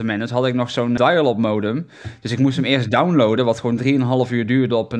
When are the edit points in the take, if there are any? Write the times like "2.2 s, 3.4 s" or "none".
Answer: 1.0 s